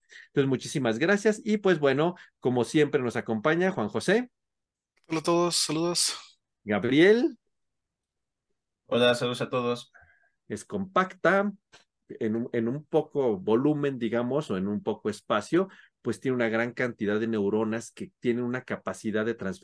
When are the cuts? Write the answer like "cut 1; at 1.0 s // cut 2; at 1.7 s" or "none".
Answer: cut 1; at 10.4 s